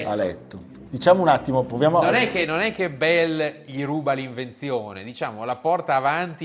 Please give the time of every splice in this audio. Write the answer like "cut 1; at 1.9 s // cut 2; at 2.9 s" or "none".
none

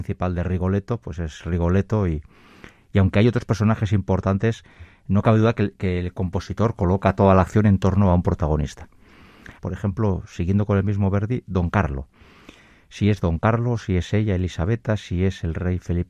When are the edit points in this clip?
cut 1; at 9.6 s

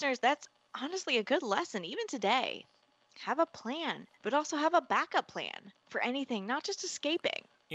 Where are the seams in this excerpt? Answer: cut 1; at 4.1 s // cut 2; at 5.8 s

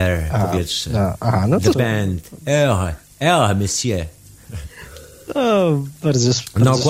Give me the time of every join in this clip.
cut 1; at 1.7 s

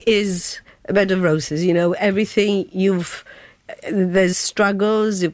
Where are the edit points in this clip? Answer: cut 1; at 4.3 s

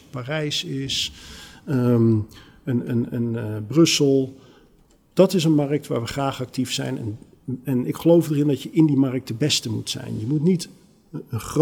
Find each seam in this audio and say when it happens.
none

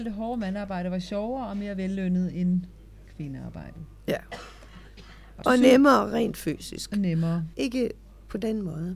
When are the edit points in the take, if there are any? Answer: cut 1; at 5.4 s // cut 2; at 7.5 s

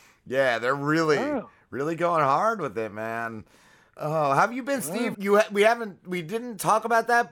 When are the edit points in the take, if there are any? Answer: cut 1; at 5.1 s

